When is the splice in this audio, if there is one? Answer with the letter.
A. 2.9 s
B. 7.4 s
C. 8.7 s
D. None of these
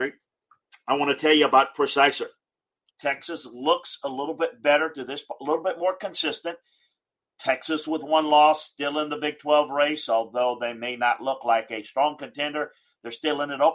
A